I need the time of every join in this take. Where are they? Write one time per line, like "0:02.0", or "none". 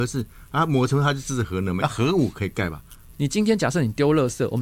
0:01.8
0:03.1